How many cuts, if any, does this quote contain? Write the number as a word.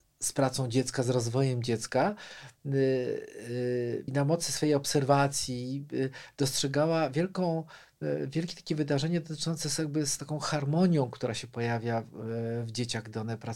one